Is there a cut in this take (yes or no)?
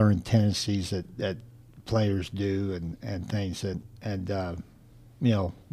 no